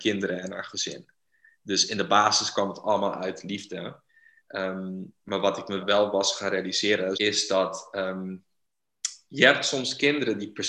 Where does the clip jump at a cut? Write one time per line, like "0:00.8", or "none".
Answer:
0:05.8
0:07.1